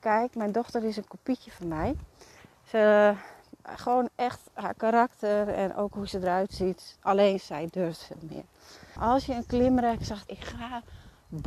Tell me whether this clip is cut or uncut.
cut